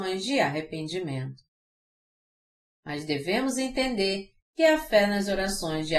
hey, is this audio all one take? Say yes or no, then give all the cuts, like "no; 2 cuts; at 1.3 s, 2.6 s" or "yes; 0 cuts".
yes; 0 cuts